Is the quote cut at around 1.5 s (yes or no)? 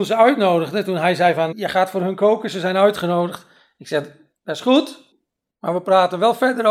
yes